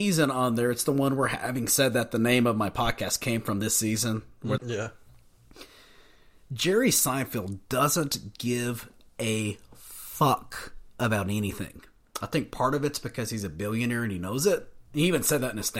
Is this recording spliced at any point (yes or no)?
yes